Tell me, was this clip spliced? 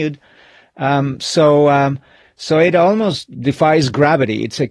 no; 0 cuts

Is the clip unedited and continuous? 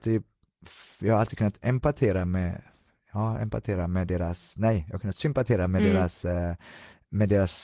yes; 0 cuts

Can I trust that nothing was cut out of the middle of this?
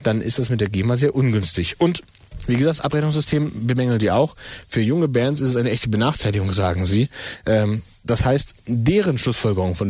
yes; 0 cuts

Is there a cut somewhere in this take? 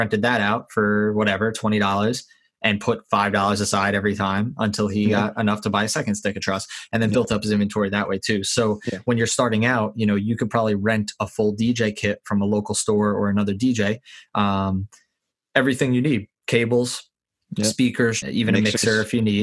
yes; 1 cut; at 18.2 s

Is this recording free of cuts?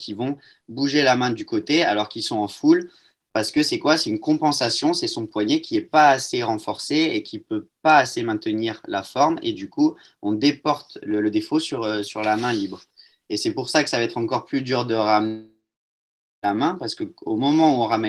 yes; 0 cuts

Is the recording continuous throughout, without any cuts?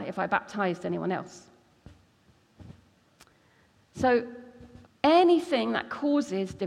no; 1 cut; at 4.9 s

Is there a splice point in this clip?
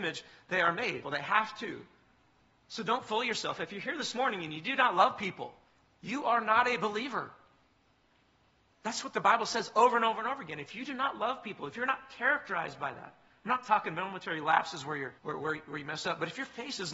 yes; 2 cuts; at 1.0 s, 15.2 s

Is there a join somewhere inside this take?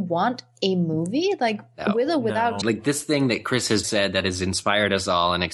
yes; 2 cuts; at 2.6 s, 3.8 s

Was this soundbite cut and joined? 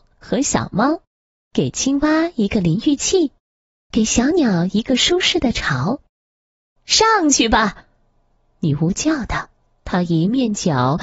yes; 1 cut; at 9.8 s

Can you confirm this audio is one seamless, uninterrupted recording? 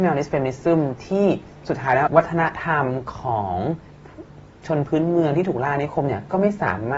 no; 1 cut; at 2.1 s

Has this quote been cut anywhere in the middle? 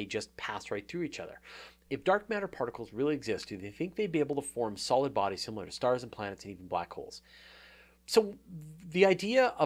yes; 1 cut; at 1.8 s

